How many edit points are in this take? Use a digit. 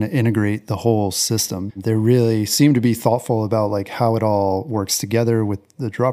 1